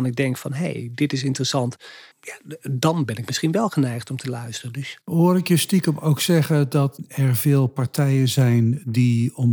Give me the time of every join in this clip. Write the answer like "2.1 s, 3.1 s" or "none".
2.1 s